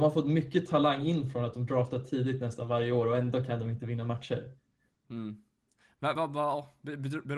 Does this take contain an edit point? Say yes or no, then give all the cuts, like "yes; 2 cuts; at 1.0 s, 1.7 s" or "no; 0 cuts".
no; 0 cuts